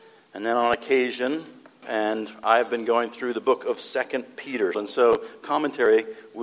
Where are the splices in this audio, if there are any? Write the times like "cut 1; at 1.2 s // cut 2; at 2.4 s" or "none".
cut 1; at 1.8 s // cut 2; at 4.7 s